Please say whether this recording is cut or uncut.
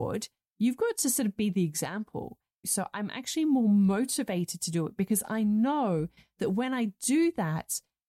cut